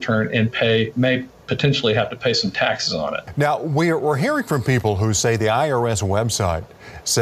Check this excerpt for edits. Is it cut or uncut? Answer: uncut